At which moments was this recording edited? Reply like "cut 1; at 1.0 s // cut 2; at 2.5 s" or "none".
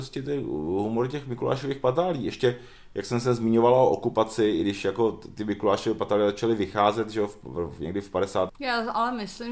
cut 1; at 8.5 s